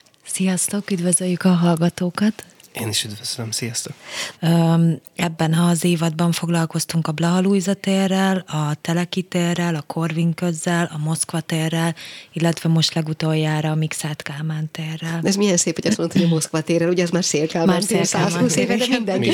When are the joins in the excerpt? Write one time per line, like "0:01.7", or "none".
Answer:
0:04.3